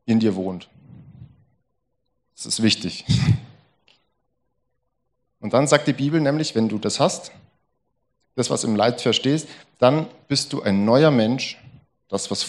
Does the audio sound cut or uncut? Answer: uncut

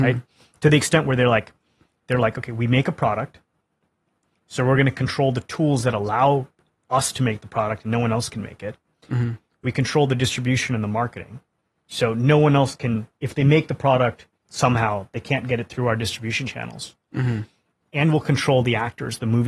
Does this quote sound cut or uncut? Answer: uncut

